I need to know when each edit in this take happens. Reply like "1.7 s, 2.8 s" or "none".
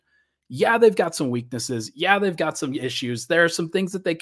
none